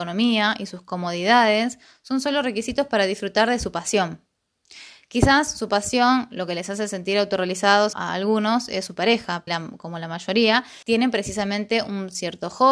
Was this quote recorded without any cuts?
no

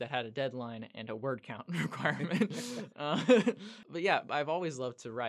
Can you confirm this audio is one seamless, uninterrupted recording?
no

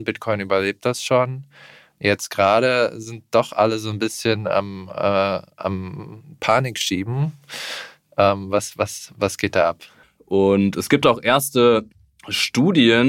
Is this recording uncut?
no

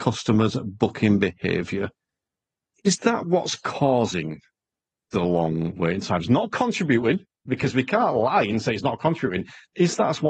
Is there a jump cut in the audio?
no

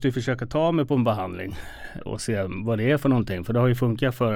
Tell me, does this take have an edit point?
yes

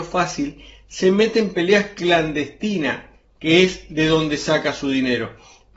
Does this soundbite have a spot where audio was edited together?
no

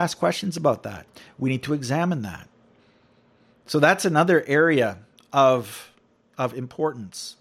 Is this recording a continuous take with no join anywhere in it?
yes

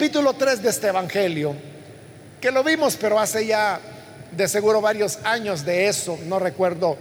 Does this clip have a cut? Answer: no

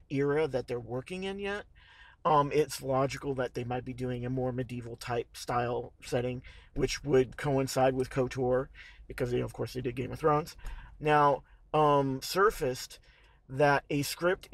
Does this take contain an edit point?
yes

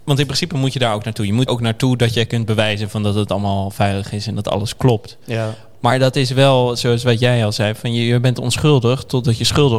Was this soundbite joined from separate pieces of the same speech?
yes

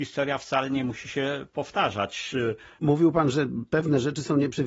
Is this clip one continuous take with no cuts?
no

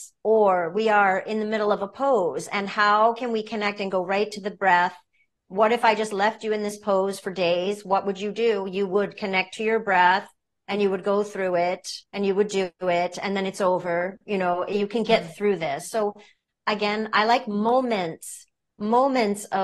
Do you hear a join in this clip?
yes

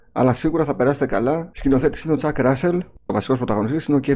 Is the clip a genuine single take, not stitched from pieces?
no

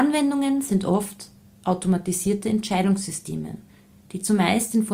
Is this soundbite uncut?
yes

